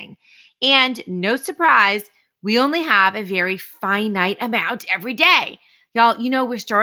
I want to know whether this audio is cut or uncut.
uncut